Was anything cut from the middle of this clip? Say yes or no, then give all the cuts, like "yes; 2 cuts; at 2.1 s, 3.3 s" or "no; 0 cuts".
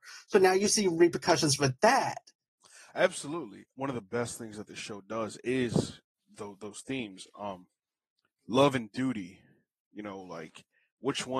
no; 0 cuts